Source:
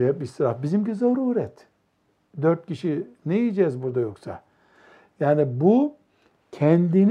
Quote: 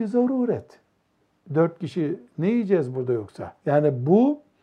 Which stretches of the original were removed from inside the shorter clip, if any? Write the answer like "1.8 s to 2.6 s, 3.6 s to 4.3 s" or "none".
4.5 s to 5.1 s